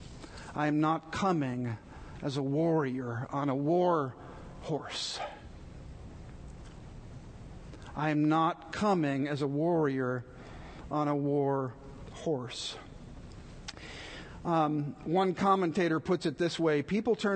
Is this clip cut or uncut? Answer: uncut